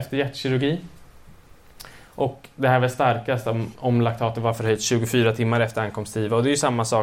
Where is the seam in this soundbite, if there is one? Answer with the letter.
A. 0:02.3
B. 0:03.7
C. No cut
B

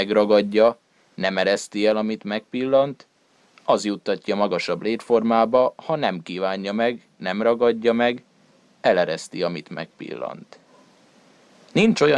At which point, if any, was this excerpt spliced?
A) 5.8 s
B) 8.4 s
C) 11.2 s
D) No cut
D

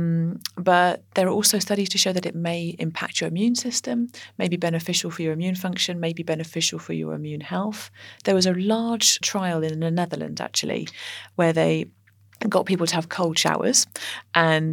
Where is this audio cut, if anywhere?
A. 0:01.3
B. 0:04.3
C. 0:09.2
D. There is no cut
C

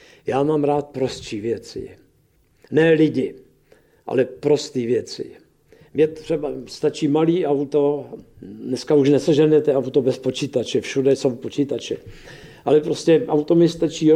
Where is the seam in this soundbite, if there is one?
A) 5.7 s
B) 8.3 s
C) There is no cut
C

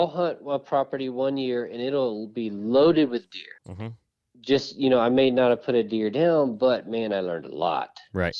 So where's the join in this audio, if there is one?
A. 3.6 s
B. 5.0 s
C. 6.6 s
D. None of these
A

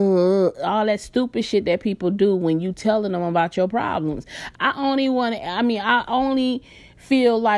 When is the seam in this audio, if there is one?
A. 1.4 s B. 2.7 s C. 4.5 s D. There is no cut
C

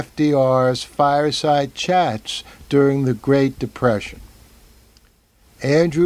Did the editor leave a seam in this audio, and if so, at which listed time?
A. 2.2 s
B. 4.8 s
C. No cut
C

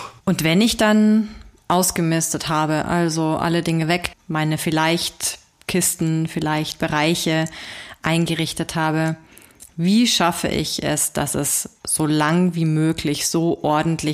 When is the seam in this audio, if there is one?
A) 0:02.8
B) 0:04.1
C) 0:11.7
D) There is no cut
B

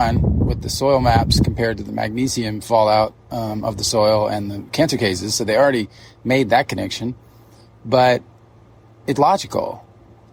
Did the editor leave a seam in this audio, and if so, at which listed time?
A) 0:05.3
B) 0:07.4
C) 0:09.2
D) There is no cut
C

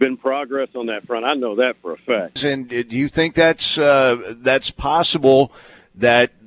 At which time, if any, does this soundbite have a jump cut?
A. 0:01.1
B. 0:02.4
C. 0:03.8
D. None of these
B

